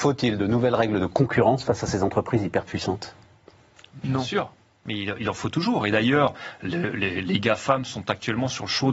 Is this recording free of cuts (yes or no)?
yes